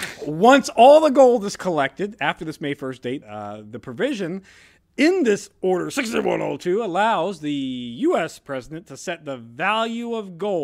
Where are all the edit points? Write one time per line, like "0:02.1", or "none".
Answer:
0:03.2

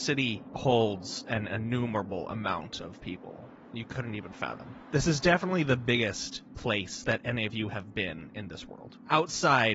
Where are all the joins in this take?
none

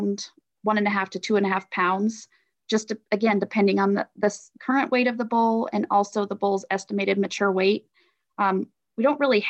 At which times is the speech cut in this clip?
0:04.6

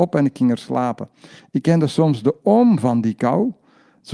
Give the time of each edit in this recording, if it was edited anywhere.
0:01.4

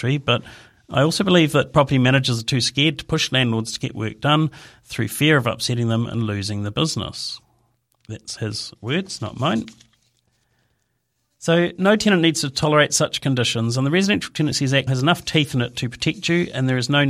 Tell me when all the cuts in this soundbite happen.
0:08.4
0:14.9

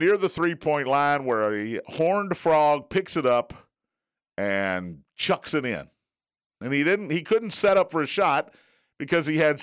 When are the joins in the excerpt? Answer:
none

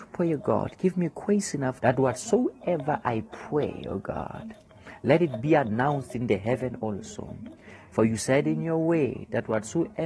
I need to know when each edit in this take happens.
0:01.8

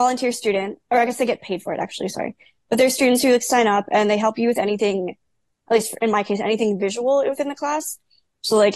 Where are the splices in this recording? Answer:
none

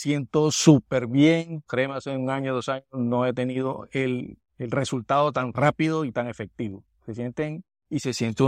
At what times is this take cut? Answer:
0:01.7
0:04.5

